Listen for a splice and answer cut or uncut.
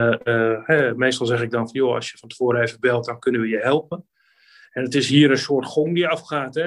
uncut